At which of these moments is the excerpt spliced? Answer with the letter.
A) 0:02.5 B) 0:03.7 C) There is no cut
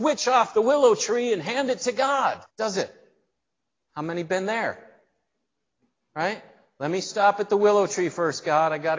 A